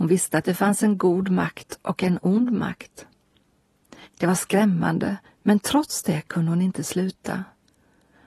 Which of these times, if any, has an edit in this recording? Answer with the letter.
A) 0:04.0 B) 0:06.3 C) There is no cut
A